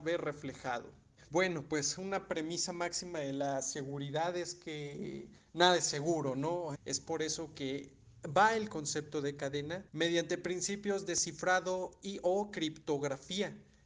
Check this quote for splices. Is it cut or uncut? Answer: cut